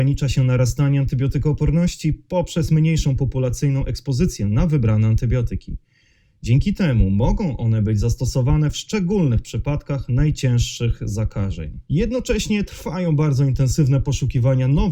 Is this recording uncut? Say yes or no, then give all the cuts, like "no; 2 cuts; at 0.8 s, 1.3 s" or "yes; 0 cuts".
no; 1 cut; at 11.8 s